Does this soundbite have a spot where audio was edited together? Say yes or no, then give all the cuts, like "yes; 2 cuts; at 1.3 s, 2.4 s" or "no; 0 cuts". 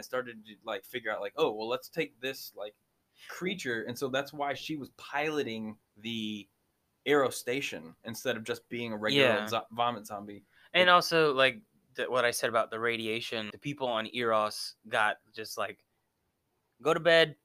yes; 2 cuts; at 5.9 s, 13.5 s